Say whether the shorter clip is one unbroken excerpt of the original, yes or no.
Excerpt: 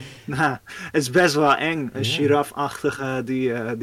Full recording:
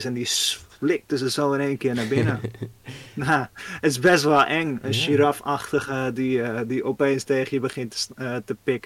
yes